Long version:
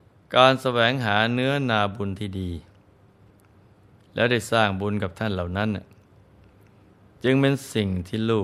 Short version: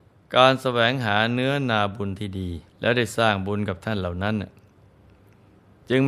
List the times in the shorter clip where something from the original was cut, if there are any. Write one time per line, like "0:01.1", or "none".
0:02.7